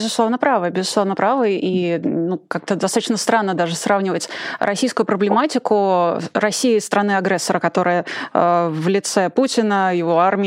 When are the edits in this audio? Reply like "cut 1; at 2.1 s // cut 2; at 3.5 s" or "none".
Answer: none